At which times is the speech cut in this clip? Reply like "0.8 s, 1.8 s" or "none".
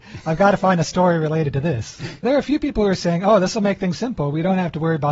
2.2 s, 3.9 s